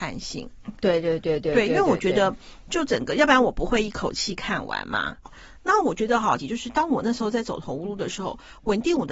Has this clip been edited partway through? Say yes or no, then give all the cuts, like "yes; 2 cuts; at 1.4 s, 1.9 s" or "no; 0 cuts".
yes; 2 cuts; at 5.2 s, 6.4 s